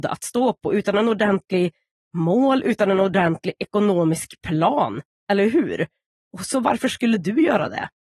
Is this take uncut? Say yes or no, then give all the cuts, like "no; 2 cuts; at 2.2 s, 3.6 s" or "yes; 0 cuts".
yes; 0 cuts